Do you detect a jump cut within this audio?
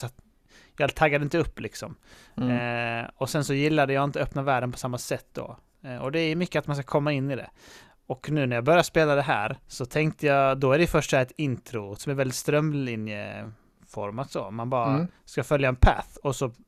yes; 3 cuts; at 9.6 s, 12.0 s, 15.2 s

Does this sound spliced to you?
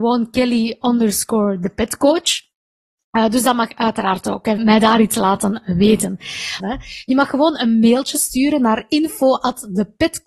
yes; 2 cuts; at 4.6 s, 6.6 s

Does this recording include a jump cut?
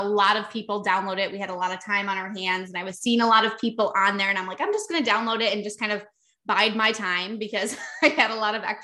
no; 0 cuts

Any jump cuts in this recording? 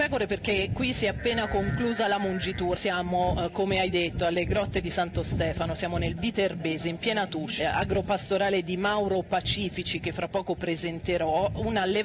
yes; 2 cuts; at 2.8 s, 7.6 s

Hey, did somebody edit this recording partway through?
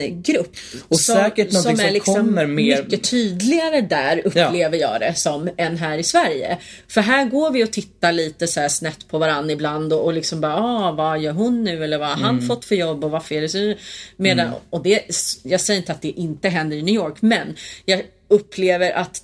no; 0 cuts

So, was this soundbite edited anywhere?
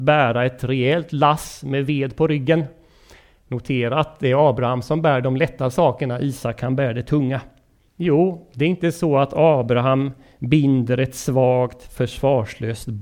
yes; 1 cut; at 7.9 s

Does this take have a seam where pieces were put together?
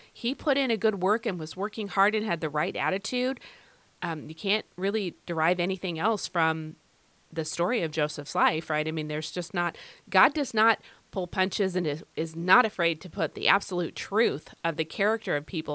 no; 0 cuts

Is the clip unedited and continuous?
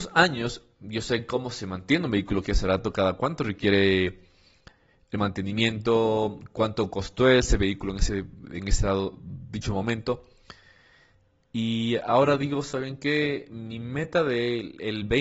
yes; 0 cuts

